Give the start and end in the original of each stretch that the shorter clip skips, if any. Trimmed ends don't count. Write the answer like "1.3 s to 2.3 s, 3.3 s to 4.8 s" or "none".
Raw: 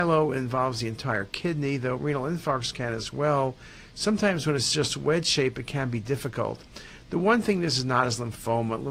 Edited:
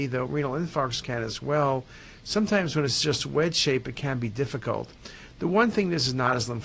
none